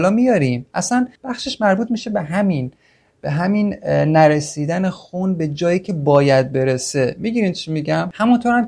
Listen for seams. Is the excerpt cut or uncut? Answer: cut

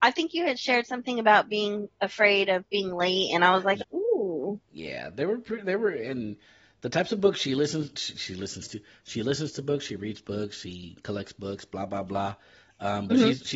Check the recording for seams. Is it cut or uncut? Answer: cut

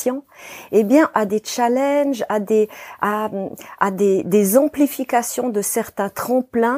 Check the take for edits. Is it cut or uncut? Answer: cut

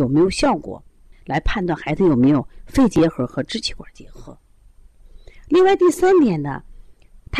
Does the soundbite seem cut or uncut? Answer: cut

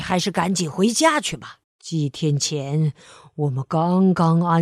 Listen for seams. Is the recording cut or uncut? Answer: cut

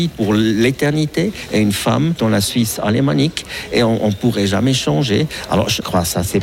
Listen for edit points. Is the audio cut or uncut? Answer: uncut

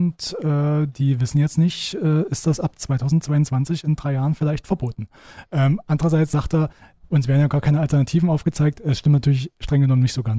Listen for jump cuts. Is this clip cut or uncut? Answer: uncut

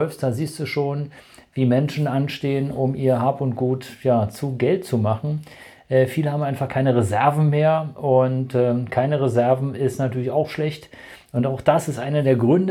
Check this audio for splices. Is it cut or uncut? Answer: uncut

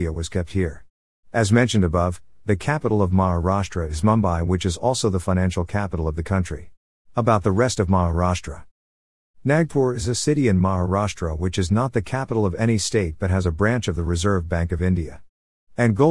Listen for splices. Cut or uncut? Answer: cut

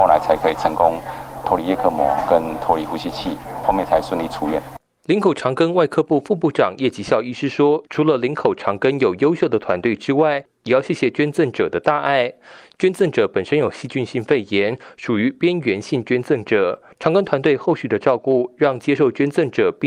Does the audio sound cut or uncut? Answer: cut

